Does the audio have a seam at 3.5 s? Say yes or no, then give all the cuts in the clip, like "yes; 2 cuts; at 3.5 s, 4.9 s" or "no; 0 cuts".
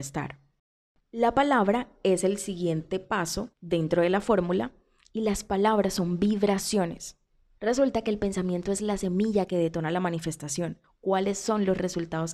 yes; 3 cuts; at 3.5 s, 7.6 s, 10.8 s